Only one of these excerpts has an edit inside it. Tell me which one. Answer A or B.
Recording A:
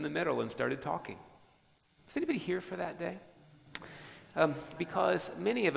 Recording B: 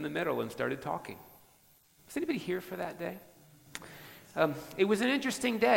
A